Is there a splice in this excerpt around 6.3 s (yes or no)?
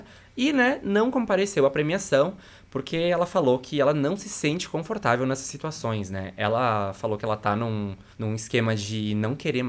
no